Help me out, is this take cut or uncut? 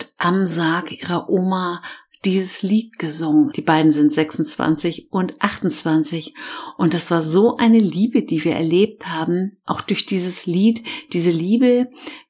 cut